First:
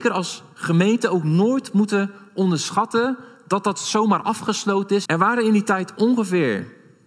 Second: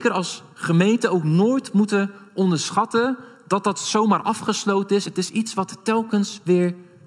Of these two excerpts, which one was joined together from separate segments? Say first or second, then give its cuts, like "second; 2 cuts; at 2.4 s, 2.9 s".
first; 1 cut; at 5.1 s